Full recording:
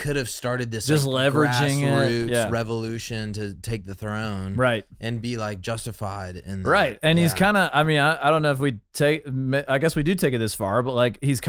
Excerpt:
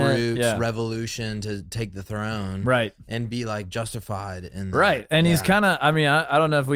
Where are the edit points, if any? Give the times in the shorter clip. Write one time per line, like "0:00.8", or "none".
none

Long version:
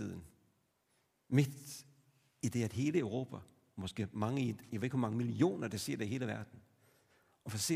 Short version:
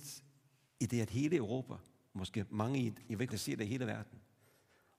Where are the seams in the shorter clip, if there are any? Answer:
0:03.3

